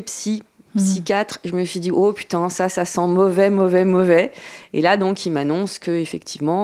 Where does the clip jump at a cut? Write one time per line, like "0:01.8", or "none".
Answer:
none